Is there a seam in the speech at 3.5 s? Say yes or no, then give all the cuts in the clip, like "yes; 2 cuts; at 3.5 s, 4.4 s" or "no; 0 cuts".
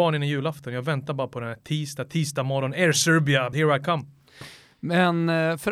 yes; 1 cut; at 3.5 s